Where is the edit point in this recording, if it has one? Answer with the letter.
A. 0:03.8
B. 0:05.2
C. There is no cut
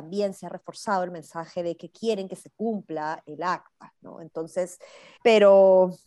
B